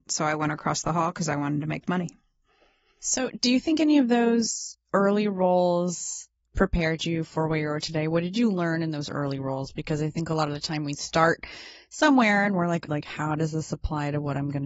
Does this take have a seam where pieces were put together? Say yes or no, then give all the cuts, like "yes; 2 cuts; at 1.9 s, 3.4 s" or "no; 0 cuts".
yes; 1 cut; at 12.9 s